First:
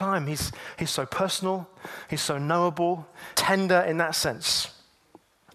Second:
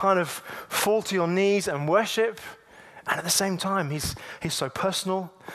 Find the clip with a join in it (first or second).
first